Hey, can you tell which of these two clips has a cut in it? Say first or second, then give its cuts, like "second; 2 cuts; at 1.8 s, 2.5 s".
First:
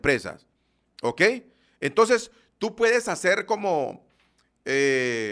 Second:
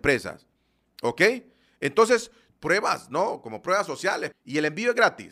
second; 2 cuts; at 2.5 s, 4.3 s